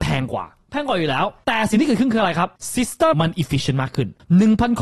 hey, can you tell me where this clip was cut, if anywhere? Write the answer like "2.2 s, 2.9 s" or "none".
3.1 s